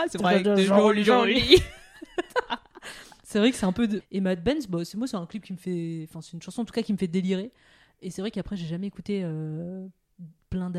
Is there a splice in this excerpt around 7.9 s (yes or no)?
no